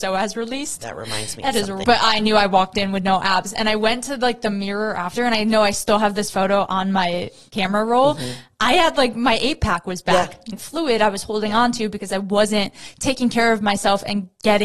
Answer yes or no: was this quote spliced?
yes